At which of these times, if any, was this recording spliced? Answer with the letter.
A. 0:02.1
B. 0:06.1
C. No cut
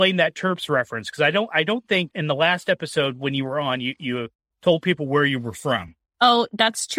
A